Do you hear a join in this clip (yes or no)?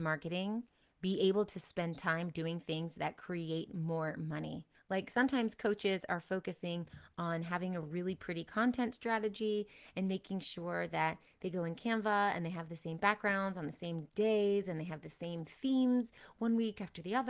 no